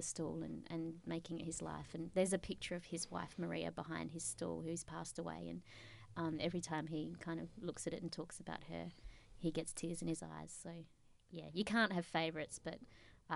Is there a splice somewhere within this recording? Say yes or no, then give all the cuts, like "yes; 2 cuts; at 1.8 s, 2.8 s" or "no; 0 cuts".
no; 0 cuts